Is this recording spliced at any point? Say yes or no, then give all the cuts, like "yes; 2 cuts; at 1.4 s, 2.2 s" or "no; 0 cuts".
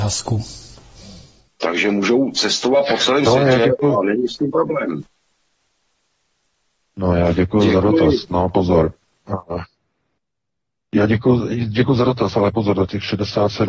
yes; 1 cut; at 1.5 s